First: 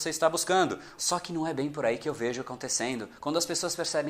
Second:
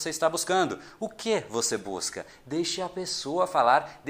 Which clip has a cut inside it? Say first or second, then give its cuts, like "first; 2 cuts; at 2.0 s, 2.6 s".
first; 1 cut; at 1.0 s